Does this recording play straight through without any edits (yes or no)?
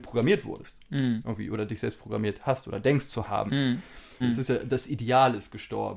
no